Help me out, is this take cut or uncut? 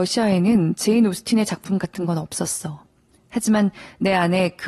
uncut